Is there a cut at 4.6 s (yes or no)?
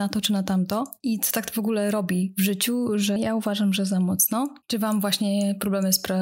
yes